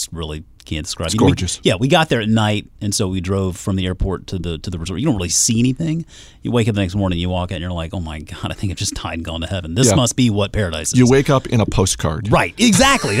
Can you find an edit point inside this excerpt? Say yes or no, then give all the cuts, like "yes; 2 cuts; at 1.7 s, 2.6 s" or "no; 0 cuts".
no; 0 cuts